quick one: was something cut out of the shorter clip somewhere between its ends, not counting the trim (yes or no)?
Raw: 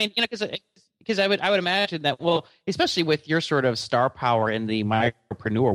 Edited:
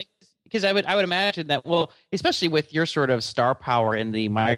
no